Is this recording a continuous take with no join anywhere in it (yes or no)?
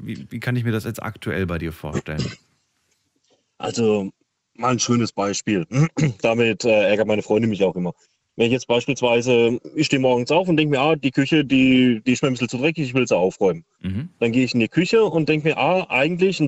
yes